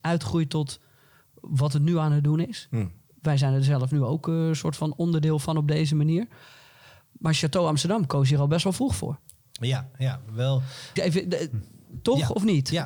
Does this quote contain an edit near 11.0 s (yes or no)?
yes